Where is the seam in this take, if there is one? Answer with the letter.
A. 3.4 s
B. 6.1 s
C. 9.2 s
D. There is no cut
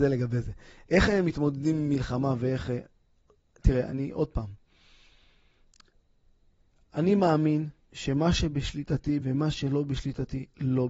C